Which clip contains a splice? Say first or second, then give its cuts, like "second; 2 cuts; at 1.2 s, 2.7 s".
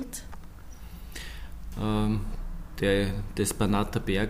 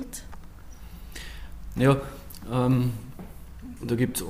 first; 1 cut; at 1.7 s